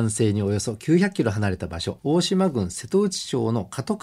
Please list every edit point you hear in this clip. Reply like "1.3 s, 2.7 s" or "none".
2.0 s